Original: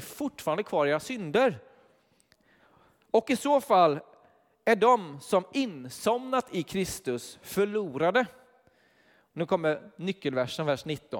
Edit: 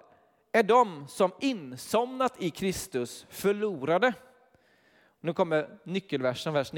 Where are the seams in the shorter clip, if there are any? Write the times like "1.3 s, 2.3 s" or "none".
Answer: none